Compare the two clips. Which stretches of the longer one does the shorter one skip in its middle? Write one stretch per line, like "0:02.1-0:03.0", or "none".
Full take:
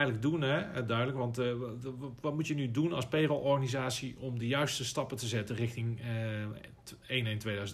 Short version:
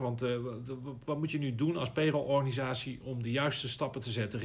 none